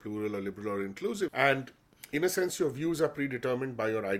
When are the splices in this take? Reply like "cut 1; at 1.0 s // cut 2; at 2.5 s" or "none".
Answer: cut 1; at 1.3 s